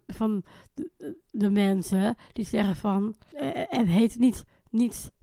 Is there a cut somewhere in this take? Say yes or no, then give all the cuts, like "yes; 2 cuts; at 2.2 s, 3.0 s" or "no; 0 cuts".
no; 0 cuts